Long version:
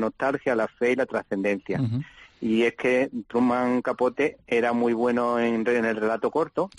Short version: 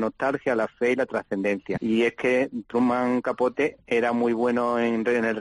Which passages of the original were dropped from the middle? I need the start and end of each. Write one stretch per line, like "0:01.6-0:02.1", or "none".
0:01.8-0:02.4